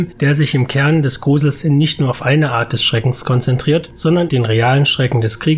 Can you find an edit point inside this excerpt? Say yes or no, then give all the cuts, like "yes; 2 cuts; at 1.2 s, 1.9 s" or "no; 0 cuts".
yes; 1 cut; at 4.3 s